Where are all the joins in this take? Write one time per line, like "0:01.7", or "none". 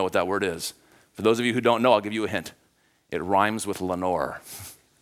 none